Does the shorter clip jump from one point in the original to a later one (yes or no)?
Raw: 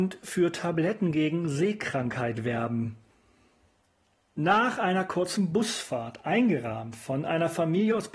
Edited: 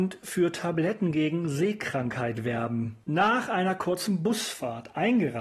yes